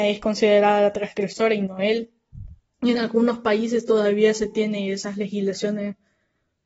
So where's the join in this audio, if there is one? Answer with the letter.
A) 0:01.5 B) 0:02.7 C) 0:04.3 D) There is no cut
B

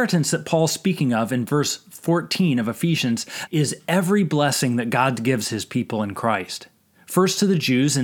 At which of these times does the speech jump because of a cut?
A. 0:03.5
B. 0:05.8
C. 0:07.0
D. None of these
A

